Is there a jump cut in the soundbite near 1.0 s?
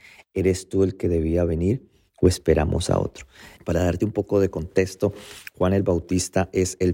no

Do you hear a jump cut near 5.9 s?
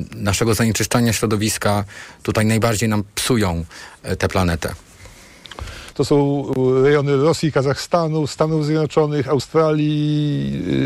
yes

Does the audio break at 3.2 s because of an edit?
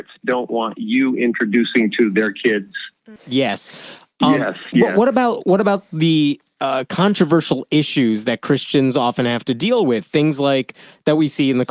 yes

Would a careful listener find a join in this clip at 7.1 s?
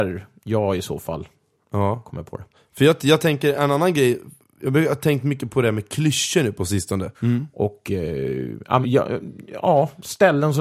yes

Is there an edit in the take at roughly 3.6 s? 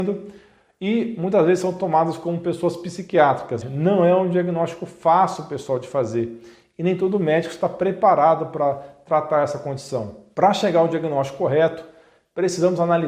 yes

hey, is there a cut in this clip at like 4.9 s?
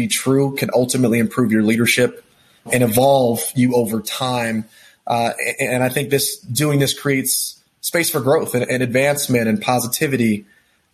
no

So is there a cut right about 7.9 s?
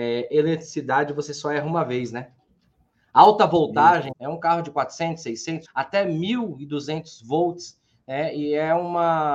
no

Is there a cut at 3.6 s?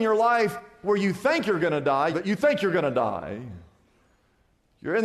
no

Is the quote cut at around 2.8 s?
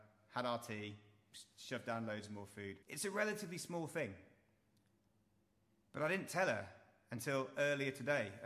yes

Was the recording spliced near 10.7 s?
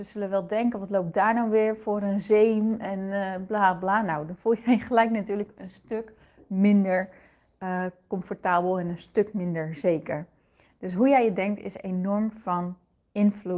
no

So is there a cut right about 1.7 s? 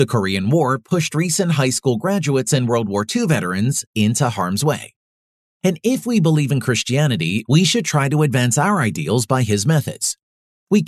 no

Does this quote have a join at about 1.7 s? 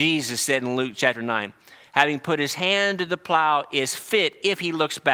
no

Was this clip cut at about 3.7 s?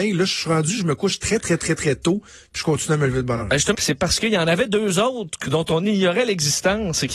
yes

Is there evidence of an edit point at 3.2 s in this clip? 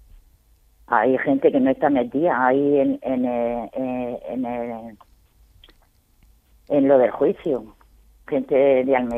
no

